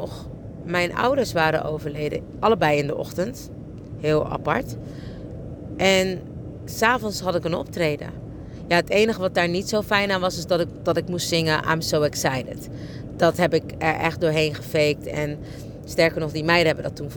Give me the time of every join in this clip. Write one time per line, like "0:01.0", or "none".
none